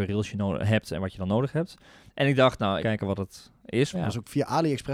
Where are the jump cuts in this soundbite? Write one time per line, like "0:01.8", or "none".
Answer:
0:02.8
0:03.9